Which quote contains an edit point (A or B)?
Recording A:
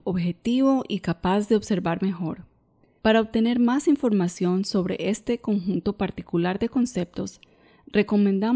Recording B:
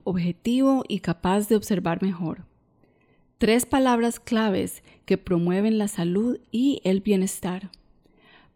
A